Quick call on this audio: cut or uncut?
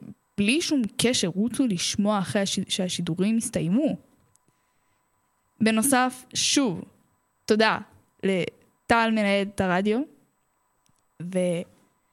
uncut